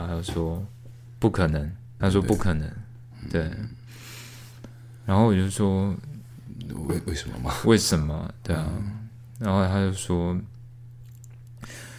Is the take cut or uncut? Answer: cut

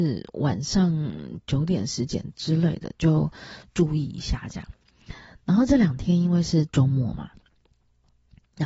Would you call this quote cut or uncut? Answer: uncut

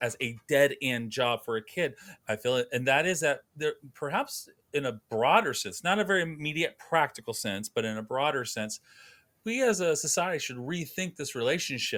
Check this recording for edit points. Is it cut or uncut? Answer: cut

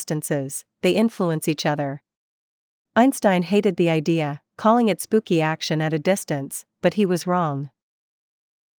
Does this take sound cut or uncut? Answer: uncut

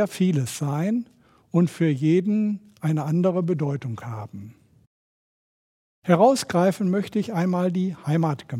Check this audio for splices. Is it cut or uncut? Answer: uncut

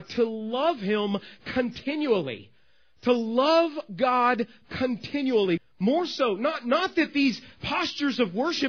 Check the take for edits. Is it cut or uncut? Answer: cut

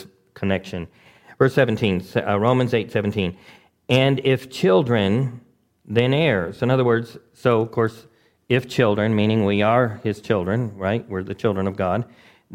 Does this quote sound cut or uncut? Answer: uncut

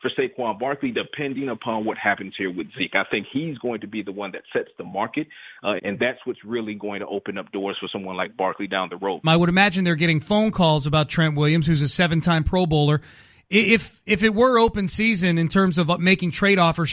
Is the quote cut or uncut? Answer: cut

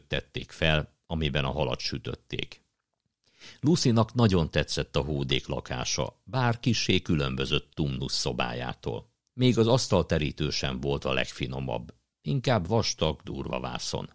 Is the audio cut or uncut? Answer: cut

